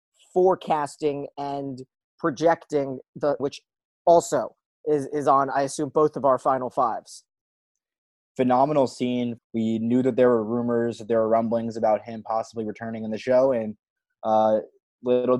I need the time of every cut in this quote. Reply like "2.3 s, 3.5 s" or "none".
3.4 s, 9.4 s